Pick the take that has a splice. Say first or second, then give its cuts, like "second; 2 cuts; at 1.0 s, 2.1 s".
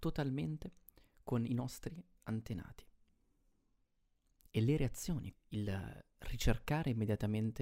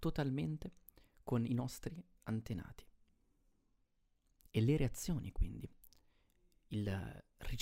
first; 1 cut; at 5.3 s